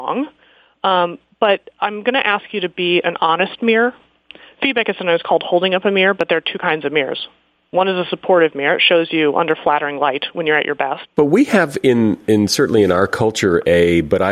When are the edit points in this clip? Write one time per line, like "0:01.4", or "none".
0:11.1